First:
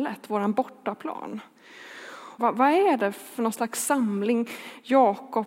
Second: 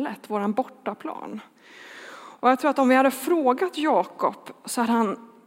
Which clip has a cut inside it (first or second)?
first